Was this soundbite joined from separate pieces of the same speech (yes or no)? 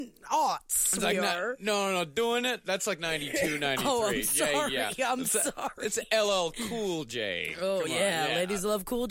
no